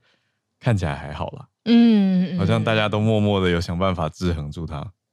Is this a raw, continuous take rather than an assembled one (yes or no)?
yes